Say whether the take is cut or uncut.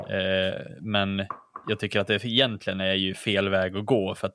uncut